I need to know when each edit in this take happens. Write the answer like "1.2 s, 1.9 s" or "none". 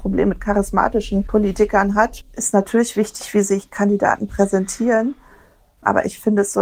none